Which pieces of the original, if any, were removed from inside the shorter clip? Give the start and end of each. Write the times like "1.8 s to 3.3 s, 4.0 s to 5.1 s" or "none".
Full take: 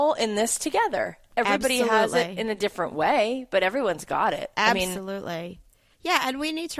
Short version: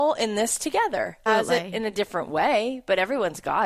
1.3 s to 1.9 s